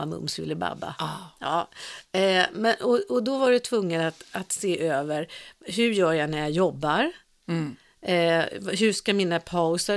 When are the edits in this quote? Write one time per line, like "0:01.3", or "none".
none